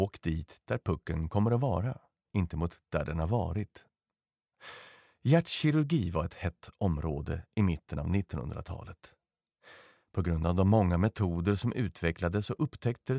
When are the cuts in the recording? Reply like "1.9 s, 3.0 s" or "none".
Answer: none

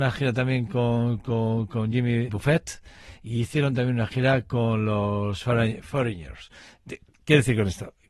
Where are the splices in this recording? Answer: 2.3 s

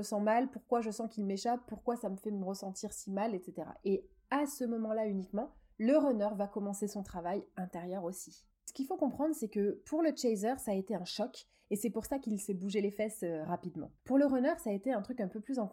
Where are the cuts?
none

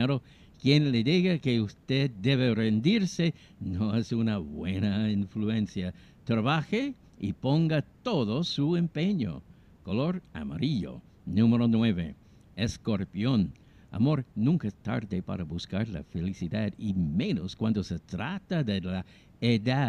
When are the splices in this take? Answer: none

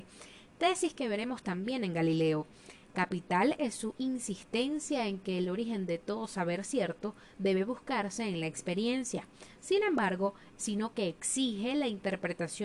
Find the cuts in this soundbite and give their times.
10.6 s

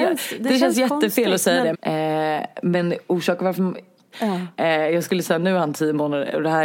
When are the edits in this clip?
1.7 s, 4.1 s

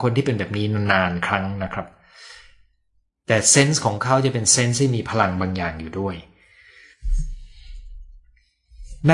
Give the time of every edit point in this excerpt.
none

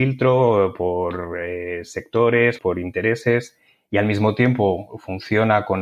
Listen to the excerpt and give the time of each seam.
2.6 s

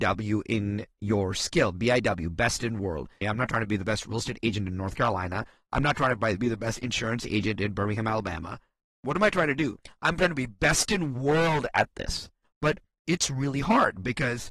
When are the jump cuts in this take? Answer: 3.2 s, 12.4 s

